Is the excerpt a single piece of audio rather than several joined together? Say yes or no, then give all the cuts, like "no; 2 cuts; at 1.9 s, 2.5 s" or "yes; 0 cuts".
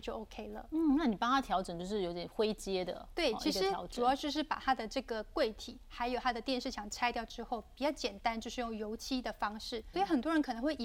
no; 1 cut; at 9.9 s